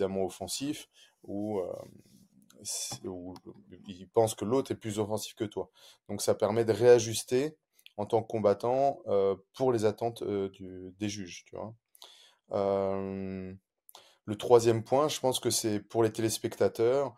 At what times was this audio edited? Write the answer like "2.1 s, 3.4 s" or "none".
none